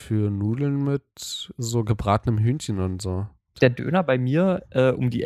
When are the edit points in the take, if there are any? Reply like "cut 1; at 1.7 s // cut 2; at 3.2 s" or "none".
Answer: cut 1; at 3.5 s